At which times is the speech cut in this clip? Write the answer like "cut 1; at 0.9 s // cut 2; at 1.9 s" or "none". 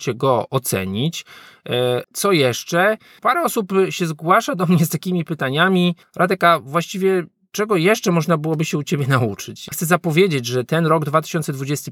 cut 1; at 2.0 s